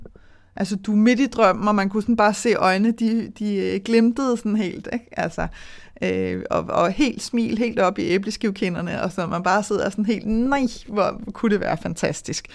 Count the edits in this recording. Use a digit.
0